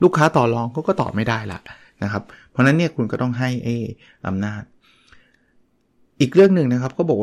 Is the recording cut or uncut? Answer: uncut